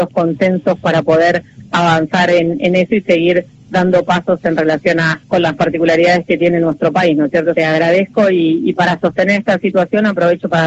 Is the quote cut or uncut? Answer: cut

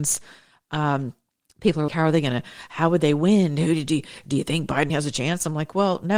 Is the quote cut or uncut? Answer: cut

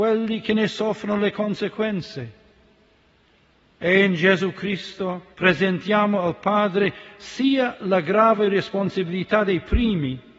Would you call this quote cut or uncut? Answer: cut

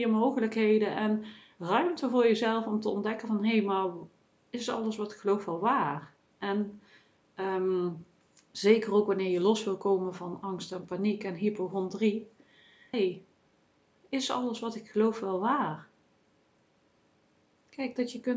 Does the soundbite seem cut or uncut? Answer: cut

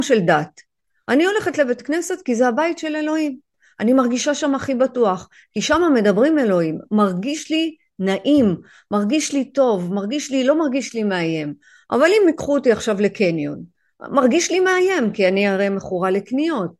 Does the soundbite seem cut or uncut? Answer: uncut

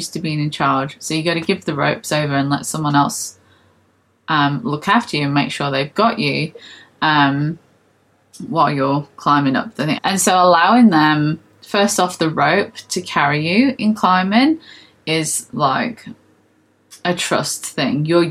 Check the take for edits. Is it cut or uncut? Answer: cut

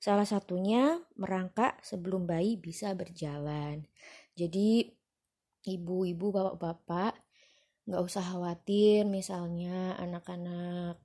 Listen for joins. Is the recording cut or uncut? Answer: uncut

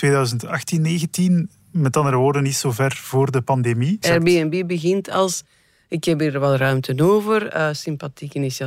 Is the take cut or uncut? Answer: cut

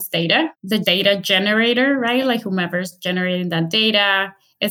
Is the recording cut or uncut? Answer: uncut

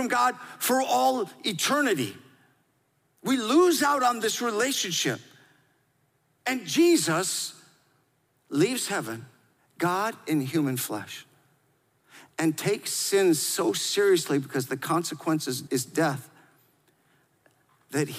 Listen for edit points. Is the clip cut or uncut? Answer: cut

